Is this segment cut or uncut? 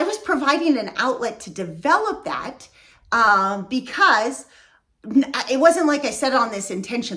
uncut